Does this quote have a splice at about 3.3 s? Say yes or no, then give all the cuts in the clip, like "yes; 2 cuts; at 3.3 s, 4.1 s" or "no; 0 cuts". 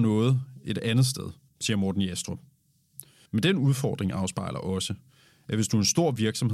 yes; 2 cuts; at 1.5 s, 3.3 s